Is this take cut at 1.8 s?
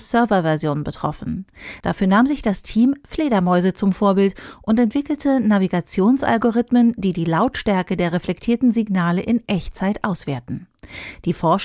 yes; 1 cut; at 1.8 s

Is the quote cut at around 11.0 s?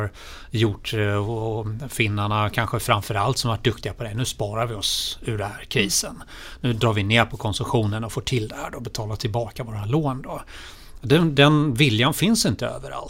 no; 0 cuts

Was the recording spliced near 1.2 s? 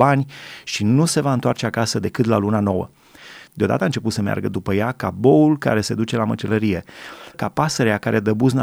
no; 2 cuts; at 3.5 s, 7.3 s

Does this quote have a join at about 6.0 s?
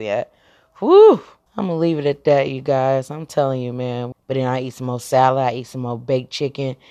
no; 2 cuts; at 1.5 s, 4.1 s

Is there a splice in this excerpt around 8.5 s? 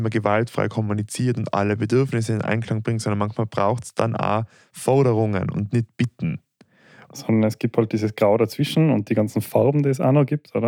no; 1 cut; at 7.1 s

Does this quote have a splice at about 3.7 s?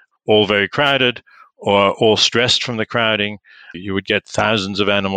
yes; 1 cut; at 3.7 s

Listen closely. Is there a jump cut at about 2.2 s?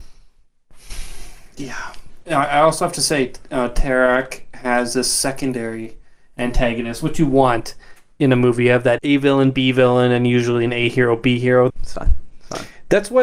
no; 2 cuts; at 9.0 s, 11.7 s

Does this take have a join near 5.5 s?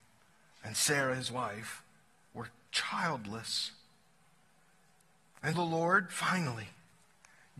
yes; 1 cut; at 5.5 s

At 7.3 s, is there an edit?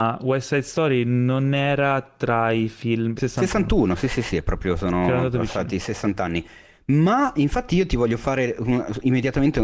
no; 1 cut; at 3.2 s

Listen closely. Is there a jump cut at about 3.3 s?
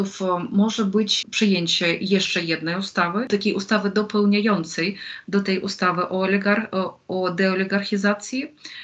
no; 1 cut; at 1.2 s

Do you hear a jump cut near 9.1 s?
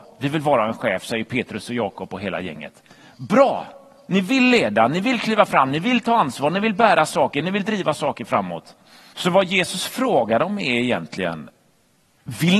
yes; 1 cut; at 9.1 s

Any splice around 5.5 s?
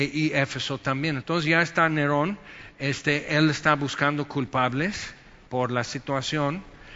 no; 1 cut; at 1.2 s

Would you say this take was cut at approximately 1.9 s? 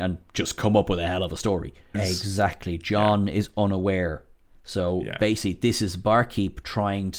yes; 1 cut; at 1.9 s

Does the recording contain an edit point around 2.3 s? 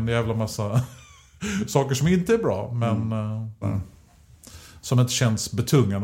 no; 1 cut; at 3.6 s

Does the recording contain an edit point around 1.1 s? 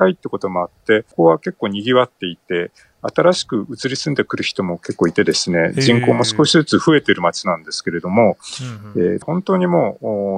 yes; 2 cuts; at 1.1 s, 9.2 s

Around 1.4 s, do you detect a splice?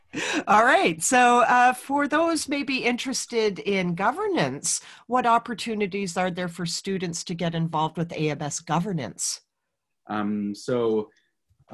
no; 1 cut; at 9.9 s

